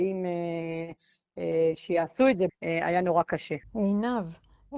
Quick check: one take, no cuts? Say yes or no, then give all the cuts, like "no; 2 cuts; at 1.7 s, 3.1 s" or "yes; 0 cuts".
no; 2 cuts; at 2.5 s, 3.6 s